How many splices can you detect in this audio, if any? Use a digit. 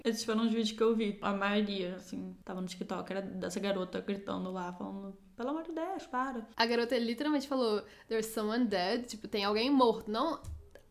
0